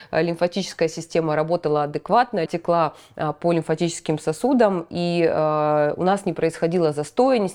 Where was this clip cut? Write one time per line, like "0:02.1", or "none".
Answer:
0:02.5

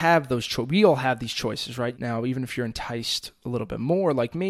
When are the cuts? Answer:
0:01.9

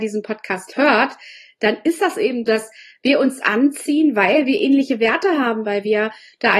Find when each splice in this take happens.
0:02.5
0:05.6

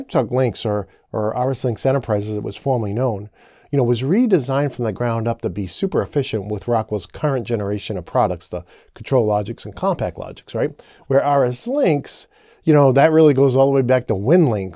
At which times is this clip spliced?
none

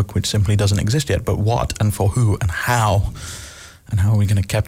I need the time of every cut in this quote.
none

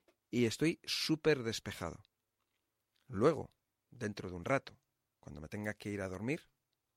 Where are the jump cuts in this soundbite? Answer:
none

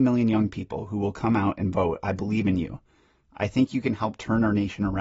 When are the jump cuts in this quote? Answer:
none

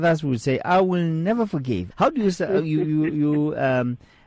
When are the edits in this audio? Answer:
0:01.9

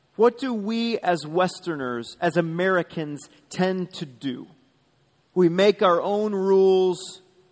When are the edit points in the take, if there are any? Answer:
0:05.2

